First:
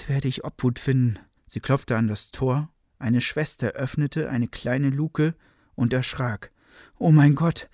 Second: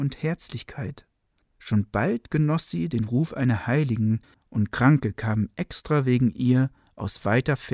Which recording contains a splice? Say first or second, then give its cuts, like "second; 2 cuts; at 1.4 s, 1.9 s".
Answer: first; 1 cut; at 1.4 s